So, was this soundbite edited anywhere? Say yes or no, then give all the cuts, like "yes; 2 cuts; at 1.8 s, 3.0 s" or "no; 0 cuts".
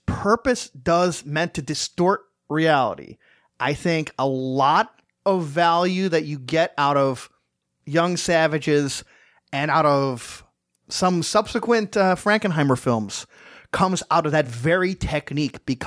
no; 0 cuts